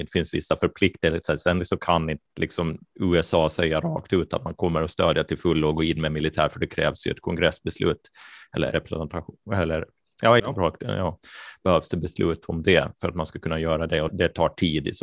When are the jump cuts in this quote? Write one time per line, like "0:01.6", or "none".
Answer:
0:08.7
0:10.4
0:14.1